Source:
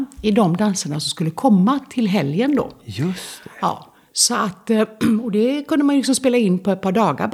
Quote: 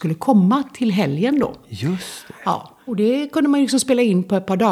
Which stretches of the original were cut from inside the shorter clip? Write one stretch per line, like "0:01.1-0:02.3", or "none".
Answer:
0:04.0-0:05.2